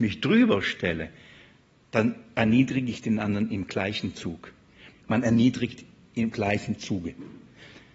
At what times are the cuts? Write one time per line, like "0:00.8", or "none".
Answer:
0:04.9